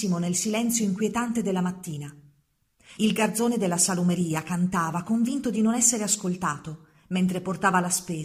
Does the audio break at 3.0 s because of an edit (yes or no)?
yes